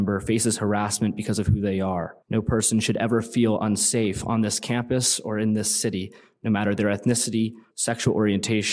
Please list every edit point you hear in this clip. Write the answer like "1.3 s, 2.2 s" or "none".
2.2 s, 7.7 s